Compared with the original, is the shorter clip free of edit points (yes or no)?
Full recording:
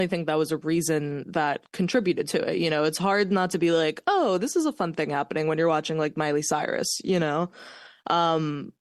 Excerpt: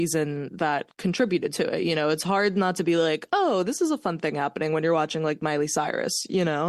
yes